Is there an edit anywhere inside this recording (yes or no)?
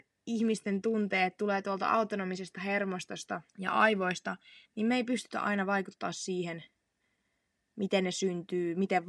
yes